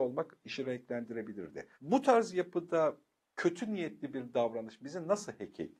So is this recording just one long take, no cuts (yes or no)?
no